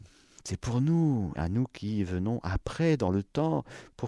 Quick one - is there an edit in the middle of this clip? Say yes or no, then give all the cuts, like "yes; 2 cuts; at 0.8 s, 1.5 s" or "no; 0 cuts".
yes; 1 cut; at 1.4 s